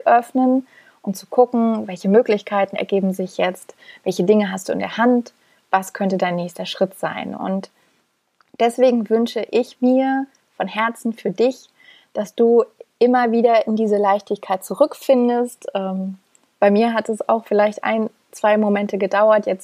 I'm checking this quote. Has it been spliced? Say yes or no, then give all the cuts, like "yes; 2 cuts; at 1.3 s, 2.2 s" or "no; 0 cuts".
yes; 1 cut; at 7.4 s